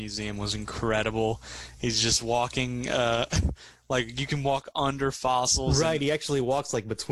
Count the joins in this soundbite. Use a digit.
0